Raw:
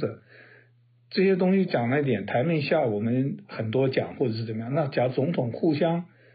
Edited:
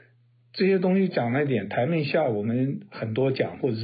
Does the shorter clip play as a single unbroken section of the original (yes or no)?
yes